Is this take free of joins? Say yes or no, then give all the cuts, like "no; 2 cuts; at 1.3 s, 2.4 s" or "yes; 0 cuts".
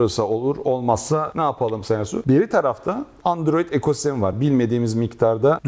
yes; 0 cuts